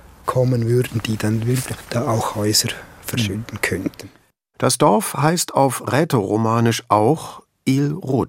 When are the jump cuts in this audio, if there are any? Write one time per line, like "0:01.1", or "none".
none